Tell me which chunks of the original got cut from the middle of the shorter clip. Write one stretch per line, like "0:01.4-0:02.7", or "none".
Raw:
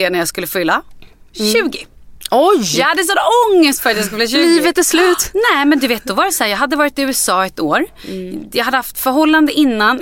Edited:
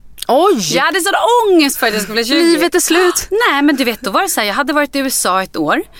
none